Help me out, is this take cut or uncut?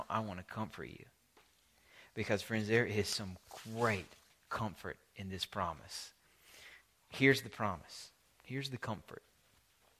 uncut